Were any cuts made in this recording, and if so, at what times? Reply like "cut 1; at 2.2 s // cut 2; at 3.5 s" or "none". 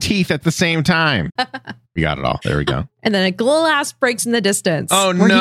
cut 1; at 1.4 s